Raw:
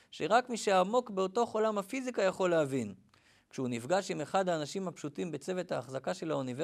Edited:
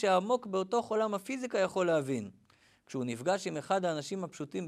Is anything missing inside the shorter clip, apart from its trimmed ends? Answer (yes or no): no